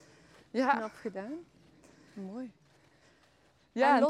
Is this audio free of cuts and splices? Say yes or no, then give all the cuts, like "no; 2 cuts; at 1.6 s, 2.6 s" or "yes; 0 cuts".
yes; 0 cuts